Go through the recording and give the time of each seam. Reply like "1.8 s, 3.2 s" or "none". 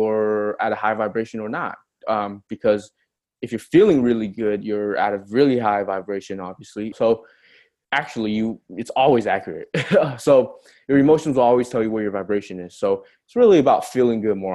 6.9 s